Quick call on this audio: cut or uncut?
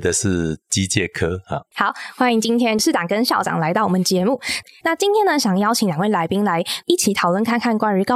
uncut